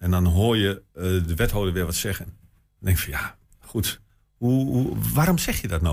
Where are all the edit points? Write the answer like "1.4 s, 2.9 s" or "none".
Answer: 2.2 s